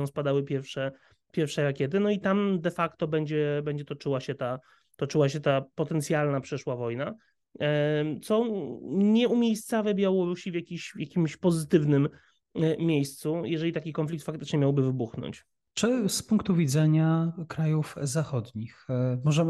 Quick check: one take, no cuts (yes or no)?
yes